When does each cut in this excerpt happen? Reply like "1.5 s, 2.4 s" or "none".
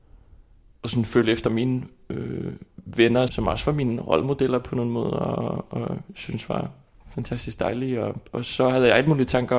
3.3 s